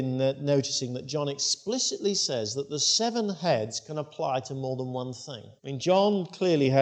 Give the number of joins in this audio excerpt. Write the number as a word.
one